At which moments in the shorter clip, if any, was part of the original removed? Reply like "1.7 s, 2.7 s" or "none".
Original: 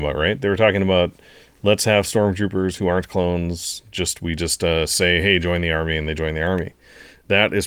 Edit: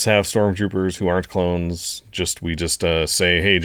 none

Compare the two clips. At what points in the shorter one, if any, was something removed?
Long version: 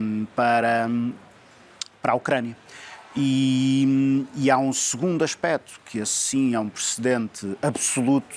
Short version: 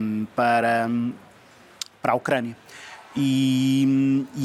none

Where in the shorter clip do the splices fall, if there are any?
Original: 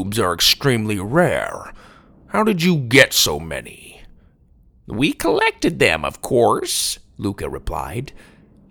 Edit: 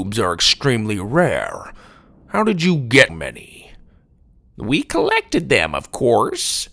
3.1 s

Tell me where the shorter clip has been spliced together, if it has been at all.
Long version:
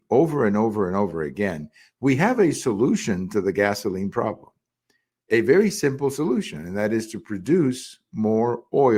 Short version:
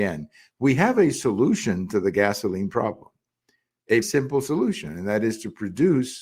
4.0 s

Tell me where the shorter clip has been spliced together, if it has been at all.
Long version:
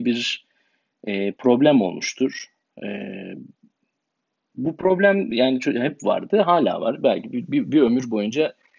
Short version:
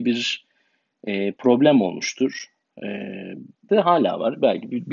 3.7 s

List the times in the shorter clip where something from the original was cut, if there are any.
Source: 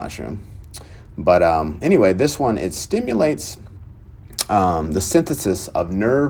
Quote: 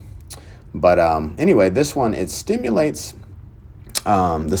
none

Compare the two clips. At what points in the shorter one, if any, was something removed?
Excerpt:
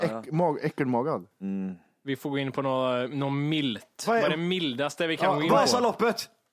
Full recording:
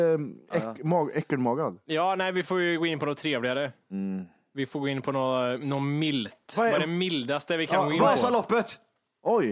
1.3 s

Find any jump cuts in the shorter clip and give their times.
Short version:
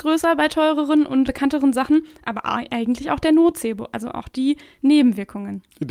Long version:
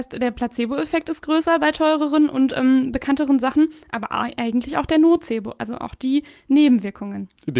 1.3 s

